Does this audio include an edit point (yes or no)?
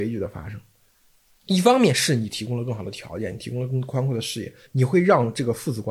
yes